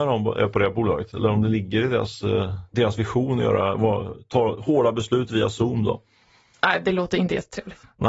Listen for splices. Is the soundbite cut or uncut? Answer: cut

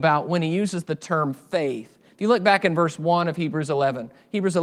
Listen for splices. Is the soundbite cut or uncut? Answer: uncut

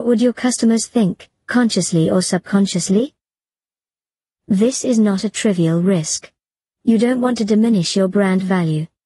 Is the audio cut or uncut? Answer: uncut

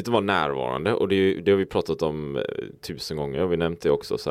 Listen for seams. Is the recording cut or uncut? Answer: uncut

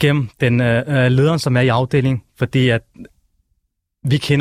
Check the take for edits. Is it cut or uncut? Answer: uncut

